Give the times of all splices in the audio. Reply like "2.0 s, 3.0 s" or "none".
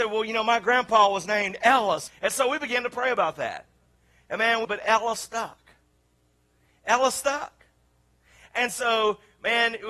2.1 s, 4.6 s